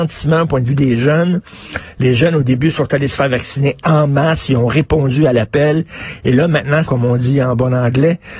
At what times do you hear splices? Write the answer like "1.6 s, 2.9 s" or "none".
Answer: 6.8 s